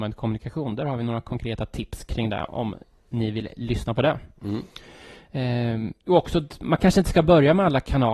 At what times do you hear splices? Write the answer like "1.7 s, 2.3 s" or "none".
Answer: none